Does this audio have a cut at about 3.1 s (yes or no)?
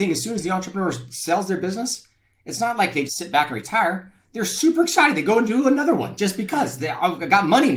yes